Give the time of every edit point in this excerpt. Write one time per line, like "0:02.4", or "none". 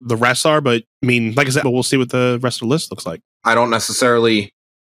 0:01.6
0:03.4